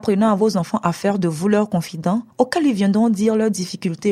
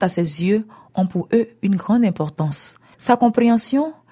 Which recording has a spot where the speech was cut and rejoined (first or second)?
first